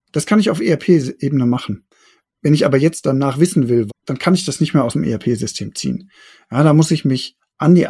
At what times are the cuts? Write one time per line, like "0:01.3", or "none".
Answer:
0:03.9